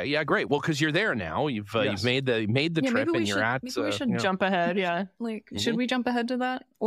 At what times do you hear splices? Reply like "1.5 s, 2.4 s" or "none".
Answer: none